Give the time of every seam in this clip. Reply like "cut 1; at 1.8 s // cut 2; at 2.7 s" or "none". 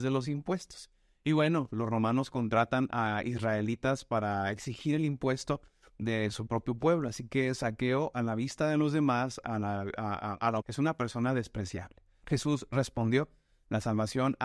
cut 1; at 10.6 s // cut 2; at 12.2 s